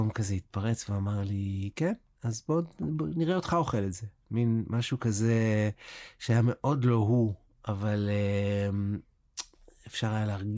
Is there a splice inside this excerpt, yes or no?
no